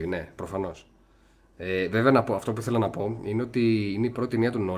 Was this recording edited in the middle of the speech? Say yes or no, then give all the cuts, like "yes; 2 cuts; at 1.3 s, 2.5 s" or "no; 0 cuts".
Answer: no; 0 cuts